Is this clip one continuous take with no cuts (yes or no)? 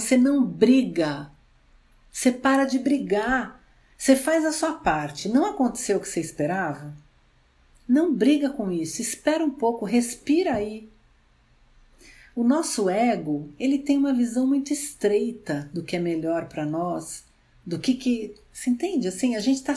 yes